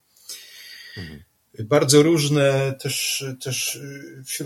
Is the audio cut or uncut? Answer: uncut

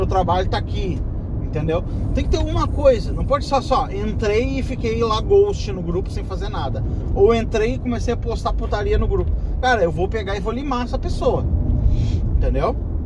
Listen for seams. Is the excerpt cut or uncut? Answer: uncut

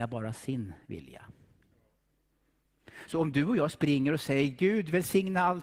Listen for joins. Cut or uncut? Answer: uncut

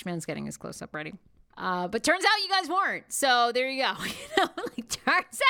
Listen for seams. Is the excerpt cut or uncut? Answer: cut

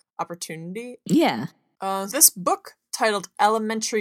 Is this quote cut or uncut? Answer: cut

